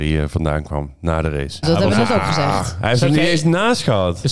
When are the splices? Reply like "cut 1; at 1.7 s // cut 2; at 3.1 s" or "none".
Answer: cut 1; at 1.6 s